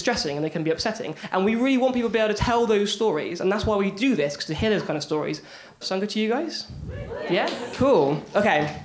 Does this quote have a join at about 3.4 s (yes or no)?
no